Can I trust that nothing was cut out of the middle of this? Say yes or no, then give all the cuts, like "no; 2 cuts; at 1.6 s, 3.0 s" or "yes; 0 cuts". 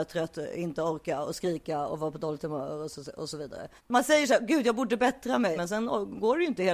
no; 2 cuts; at 3.8 s, 5.5 s